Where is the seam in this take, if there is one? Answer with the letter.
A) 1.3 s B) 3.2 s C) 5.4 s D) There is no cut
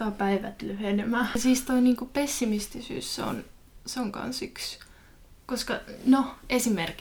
D